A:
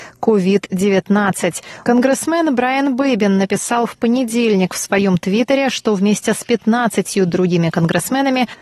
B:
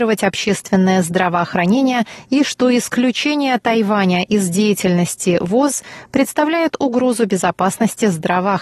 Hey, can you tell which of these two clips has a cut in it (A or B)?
A